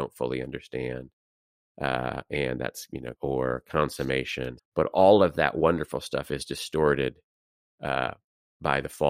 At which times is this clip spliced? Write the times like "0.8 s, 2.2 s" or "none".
3.1 s, 4.6 s